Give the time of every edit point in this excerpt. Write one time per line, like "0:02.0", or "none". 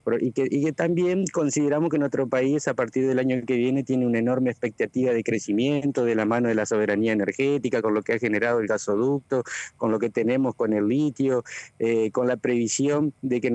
none